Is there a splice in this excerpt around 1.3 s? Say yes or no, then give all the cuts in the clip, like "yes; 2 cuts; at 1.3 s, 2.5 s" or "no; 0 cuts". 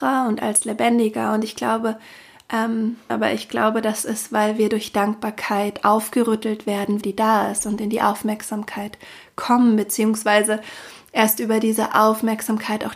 no; 2 cuts; at 3.1 s, 7.0 s